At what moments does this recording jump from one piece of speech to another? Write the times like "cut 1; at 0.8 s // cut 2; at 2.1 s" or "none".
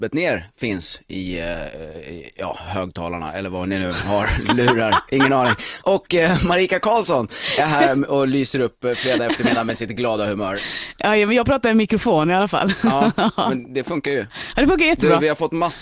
none